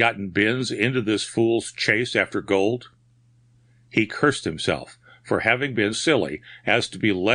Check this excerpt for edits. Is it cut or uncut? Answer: cut